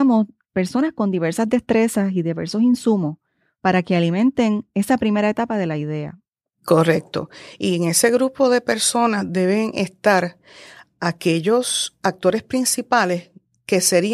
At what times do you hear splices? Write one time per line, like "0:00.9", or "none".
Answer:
none